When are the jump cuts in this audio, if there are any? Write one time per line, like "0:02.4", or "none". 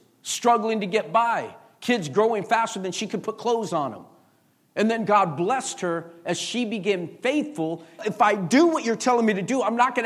0:08.0